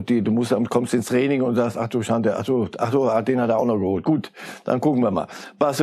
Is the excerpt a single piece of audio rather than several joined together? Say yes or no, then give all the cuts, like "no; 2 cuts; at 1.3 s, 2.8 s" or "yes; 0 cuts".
yes; 0 cuts